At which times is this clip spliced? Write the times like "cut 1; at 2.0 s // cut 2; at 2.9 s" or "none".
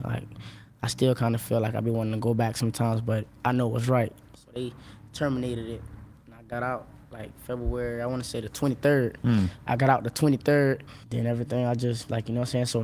cut 1; at 4.4 s // cut 2; at 11.0 s